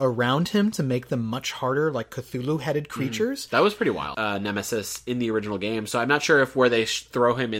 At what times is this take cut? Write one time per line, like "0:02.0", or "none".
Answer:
0:04.1